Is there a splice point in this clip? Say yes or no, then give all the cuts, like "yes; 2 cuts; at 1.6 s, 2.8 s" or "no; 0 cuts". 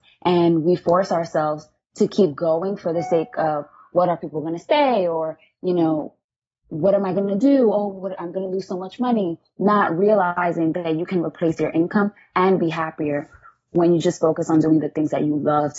no; 0 cuts